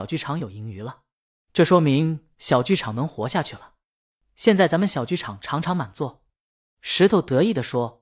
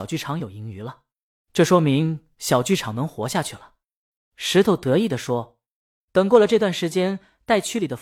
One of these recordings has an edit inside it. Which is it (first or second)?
second